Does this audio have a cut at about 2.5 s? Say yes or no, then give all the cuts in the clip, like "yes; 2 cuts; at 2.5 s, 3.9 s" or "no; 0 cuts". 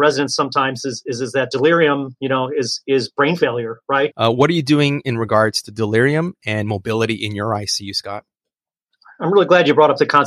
no; 1 cut; at 4.1 s